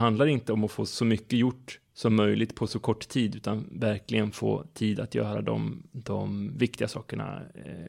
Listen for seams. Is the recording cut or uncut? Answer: uncut